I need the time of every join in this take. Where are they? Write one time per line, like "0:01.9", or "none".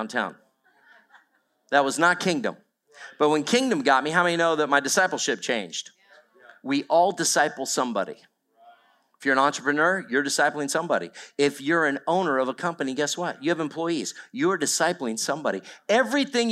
none